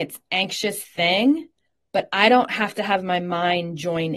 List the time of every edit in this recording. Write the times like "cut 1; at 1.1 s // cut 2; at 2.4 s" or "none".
none